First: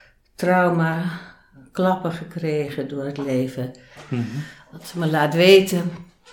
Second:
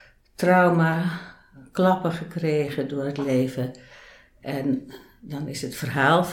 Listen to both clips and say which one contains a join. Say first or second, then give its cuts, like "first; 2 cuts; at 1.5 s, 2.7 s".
first; 1 cut; at 4.0 s